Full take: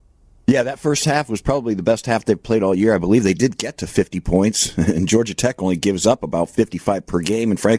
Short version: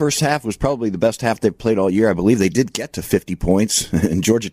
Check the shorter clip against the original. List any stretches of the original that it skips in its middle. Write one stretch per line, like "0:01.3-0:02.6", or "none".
none